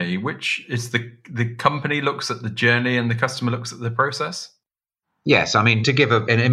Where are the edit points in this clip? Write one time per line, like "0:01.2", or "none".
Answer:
none